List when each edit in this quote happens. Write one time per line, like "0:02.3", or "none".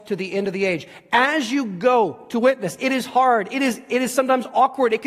none